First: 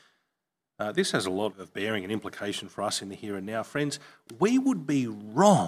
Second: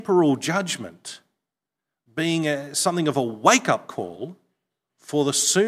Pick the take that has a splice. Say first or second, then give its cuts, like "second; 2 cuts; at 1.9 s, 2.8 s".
first; 1 cut; at 1.5 s